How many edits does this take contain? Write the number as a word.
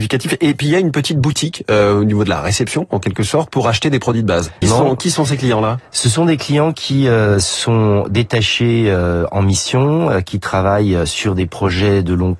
one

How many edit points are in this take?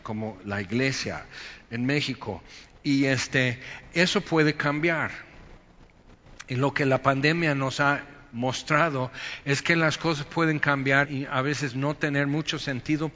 one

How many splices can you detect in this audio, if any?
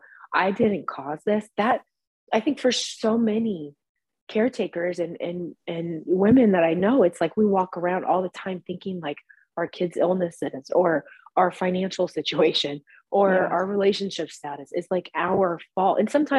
zero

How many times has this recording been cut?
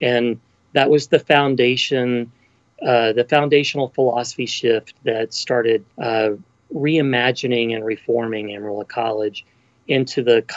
one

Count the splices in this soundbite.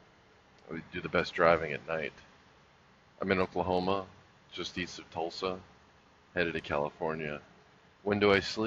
zero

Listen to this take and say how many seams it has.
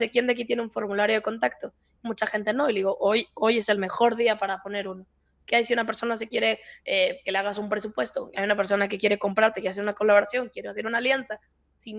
zero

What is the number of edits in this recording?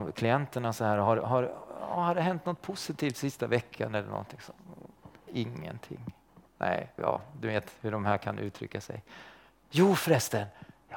two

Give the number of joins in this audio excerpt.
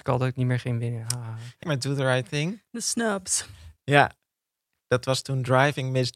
one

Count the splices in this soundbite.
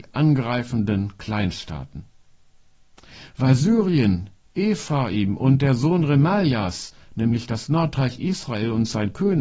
zero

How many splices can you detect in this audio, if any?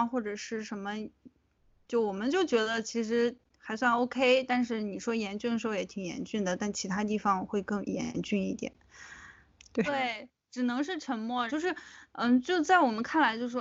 three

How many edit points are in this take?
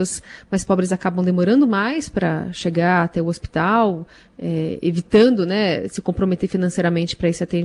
zero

